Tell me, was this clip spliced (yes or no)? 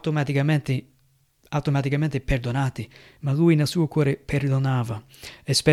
yes